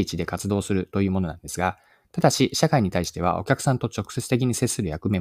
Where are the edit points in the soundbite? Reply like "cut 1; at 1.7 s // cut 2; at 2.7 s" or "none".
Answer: none